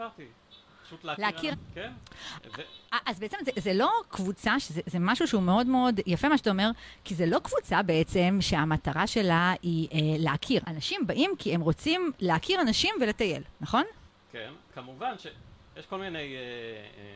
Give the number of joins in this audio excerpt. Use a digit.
3